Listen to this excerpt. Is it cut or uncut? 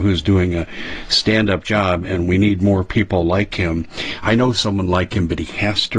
uncut